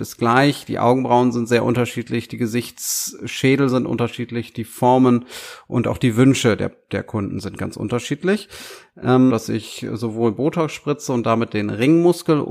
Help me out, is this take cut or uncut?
cut